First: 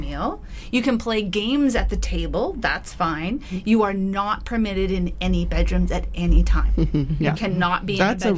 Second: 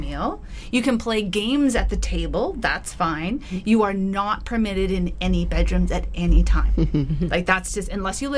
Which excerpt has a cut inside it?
first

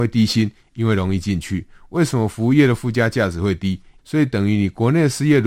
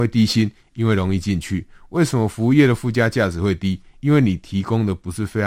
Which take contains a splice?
first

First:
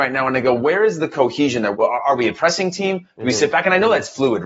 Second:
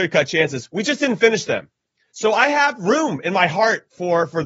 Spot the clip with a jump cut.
first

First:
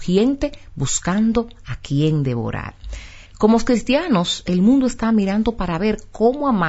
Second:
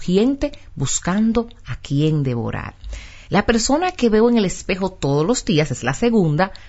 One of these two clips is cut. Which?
first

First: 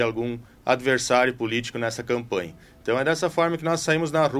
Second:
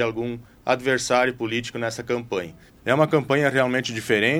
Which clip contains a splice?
second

